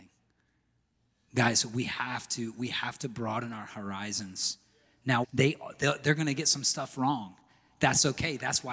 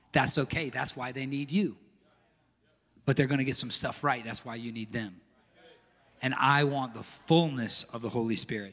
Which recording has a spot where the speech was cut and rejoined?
first; 1 cut; at 5.2 s

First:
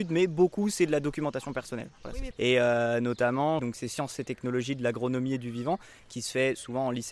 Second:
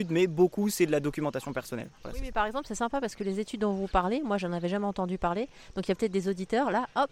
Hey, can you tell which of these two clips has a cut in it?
first; 2 cuts; at 2.3 s, 3.6 s

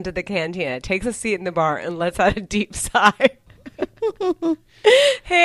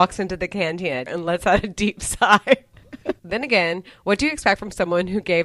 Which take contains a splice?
second; 2 cuts; at 1.1 s, 3.2 s

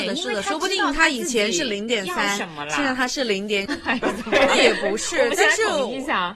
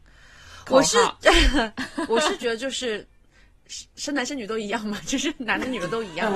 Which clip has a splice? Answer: first; 1 cut; at 3.7 s

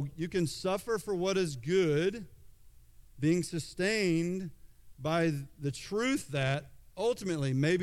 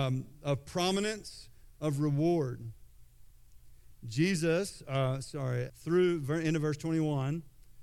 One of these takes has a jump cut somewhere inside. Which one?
second; 3 cuts; at 1.7 s, 3.9 s, 5.7 s

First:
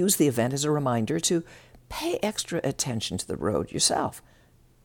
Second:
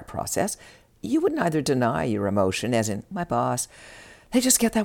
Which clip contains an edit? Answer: second; 1 cut; at 3.1 s

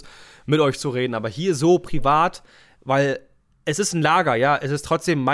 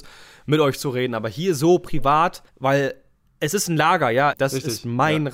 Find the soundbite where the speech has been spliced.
second; 2 cuts; at 2.5 s, 4.3 s

